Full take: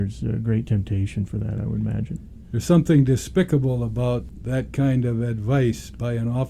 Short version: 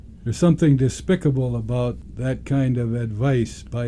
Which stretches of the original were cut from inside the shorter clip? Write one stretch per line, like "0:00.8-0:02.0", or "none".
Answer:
none